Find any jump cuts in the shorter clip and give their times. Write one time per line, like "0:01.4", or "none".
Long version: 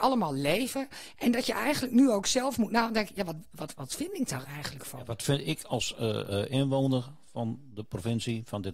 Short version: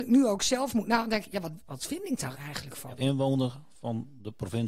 0:01.7
0:03.0